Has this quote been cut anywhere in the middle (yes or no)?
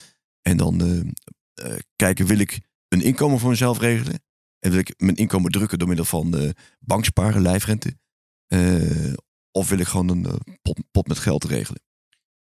no